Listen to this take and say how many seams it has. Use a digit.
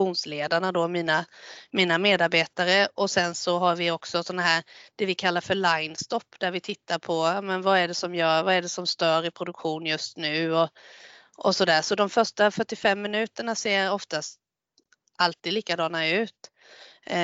0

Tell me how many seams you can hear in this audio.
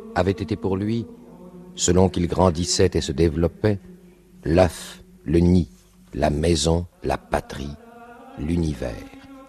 1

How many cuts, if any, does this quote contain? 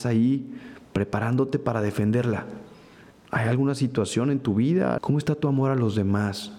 2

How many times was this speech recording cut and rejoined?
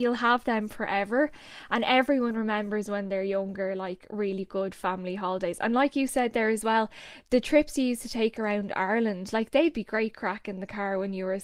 0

